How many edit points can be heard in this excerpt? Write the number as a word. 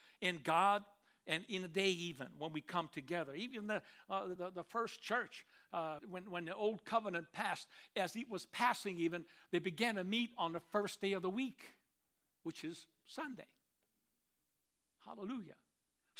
two